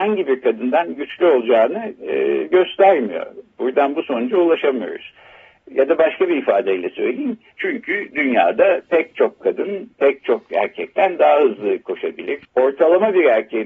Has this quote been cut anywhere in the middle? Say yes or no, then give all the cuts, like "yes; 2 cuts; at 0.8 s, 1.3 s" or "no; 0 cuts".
yes; 2 cuts; at 7.5 s, 12.4 s